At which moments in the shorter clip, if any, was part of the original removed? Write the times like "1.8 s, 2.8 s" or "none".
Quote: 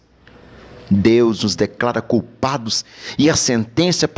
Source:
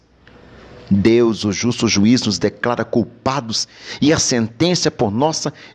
1.4 s